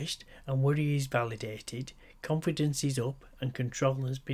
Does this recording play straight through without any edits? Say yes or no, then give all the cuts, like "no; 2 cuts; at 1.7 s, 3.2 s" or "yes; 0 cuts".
yes; 0 cuts